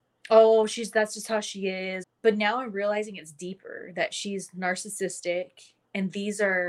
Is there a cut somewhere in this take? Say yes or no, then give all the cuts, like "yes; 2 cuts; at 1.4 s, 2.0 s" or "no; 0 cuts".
yes; 1 cut; at 2.0 s